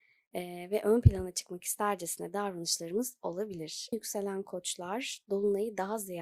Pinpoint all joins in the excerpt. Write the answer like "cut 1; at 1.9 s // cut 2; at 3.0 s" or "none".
cut 1; at 3.9 s